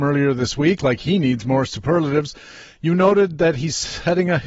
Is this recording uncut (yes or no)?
yes